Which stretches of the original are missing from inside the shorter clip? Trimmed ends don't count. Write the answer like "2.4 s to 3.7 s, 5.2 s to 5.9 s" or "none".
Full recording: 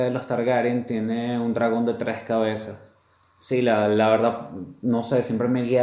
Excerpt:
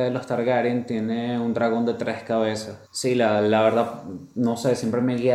2.8 s to 3.3 s

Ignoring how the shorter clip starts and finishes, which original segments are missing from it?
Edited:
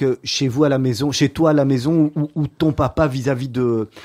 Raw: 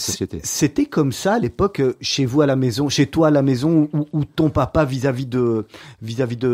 none

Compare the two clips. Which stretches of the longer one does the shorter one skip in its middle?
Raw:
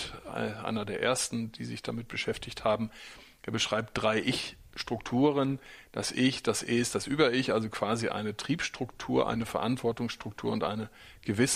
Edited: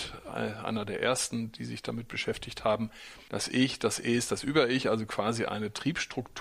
3.3 s to 5.9 s

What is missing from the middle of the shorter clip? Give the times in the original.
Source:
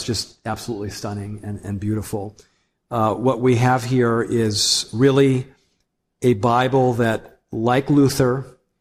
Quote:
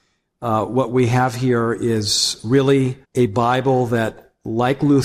5.5 s to 6.1 s

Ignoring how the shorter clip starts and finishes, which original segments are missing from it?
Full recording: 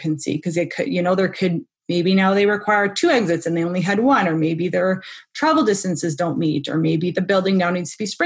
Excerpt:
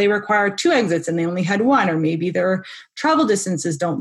none

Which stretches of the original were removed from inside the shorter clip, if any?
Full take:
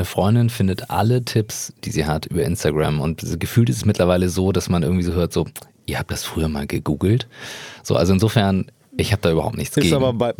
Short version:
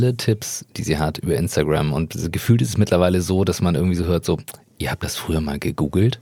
none

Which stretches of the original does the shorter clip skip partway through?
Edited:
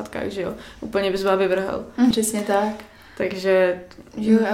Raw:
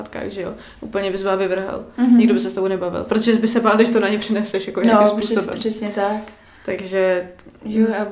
2.1 s to 5.6 s

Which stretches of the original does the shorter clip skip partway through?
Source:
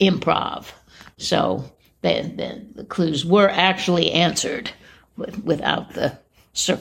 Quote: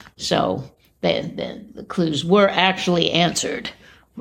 none

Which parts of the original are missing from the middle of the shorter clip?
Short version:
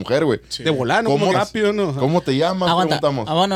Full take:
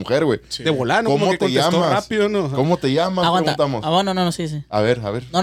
1.3 s to 1.9 s

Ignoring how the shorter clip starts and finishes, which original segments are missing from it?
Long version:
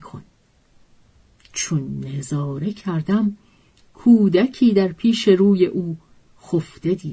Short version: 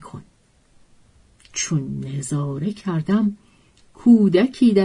none

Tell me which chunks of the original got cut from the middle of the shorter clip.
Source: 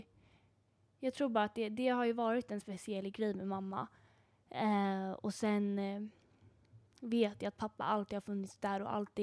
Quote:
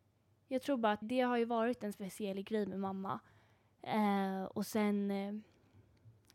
1.5 s to 1.7 s

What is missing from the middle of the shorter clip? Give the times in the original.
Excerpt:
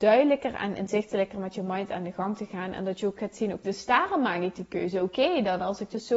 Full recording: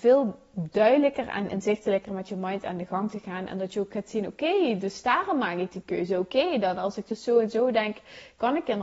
4.4 s to 4.8 s

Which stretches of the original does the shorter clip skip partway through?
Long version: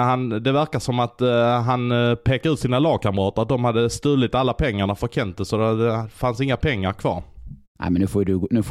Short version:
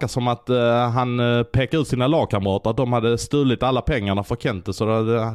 none

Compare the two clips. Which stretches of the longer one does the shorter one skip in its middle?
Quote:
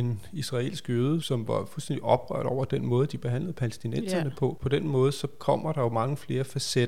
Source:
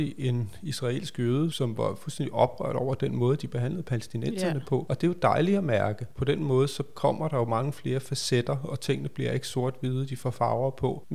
4.9 s to 6.1 s

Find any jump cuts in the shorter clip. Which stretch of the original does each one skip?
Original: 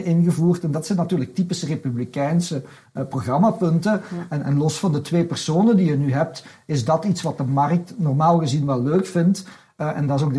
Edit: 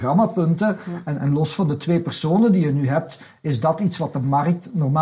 none

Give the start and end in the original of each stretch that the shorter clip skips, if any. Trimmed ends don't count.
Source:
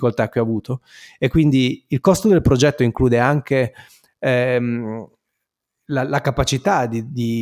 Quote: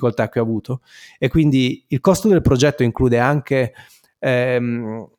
none

